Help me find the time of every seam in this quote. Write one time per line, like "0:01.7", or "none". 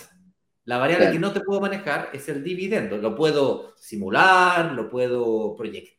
none